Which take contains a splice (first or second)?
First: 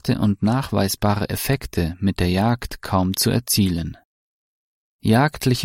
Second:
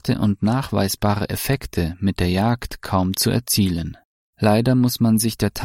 second